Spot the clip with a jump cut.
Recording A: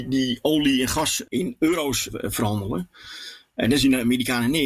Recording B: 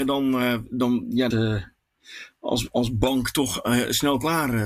B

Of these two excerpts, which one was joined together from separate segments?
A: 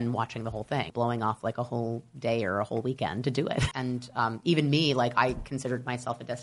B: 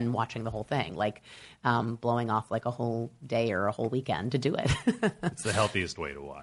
A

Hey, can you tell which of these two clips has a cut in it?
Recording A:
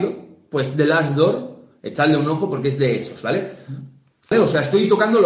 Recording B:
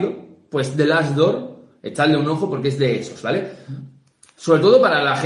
A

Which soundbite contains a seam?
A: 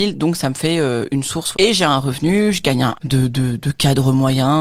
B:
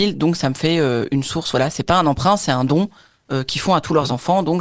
A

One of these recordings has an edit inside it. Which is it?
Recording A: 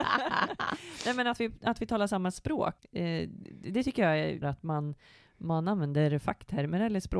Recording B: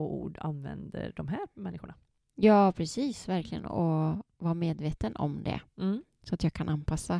A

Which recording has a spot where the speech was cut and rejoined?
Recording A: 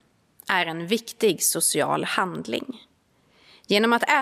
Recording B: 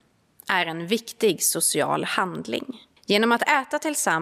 B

